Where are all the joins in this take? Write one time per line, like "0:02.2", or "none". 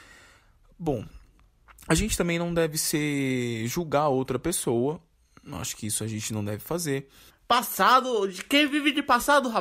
0:07.3